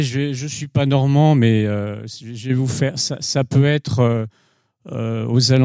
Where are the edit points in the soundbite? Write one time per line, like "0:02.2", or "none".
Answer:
none